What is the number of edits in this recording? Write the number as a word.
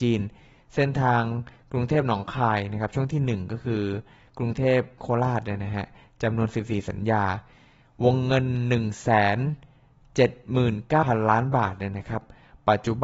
one